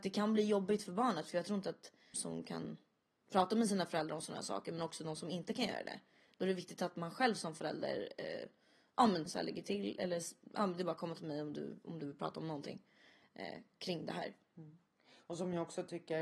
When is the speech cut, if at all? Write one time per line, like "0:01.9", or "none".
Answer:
0:02.1
0:09.3